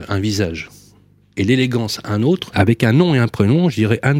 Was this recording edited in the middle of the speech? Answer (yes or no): yes